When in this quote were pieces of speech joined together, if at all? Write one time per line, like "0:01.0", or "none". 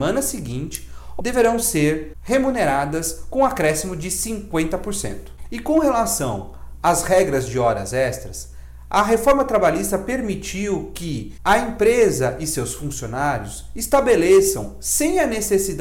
0:01.2